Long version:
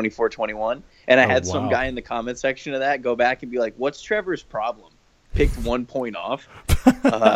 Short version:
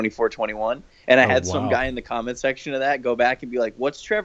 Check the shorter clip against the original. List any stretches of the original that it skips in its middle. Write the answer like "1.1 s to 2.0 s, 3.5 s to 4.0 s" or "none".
none